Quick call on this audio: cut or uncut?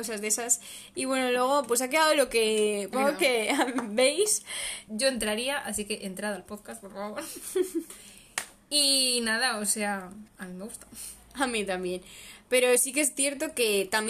cut